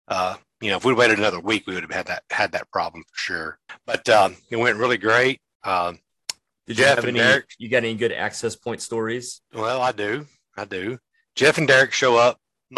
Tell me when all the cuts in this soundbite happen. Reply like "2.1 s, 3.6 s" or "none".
none